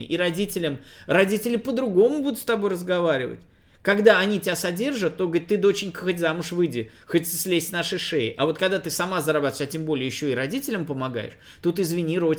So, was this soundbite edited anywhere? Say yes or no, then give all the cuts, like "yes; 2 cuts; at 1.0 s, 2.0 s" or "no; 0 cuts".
no; 0 cuts